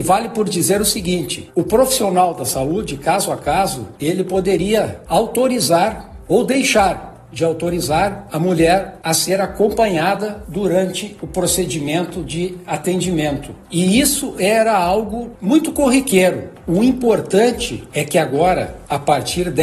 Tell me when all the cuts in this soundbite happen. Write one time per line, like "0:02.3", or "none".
0:05.1